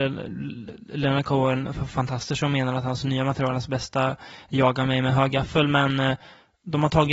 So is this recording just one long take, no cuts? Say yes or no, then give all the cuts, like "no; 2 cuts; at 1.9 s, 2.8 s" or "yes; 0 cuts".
yes; 0 cuts